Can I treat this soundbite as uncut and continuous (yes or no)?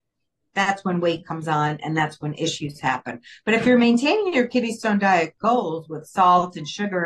yes